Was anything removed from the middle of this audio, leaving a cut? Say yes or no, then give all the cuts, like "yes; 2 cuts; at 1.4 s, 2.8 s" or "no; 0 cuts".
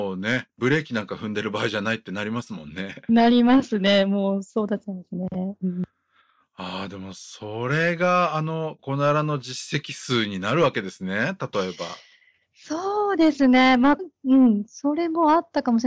yes; 2 cuts; at 8.8 s, 14.0 s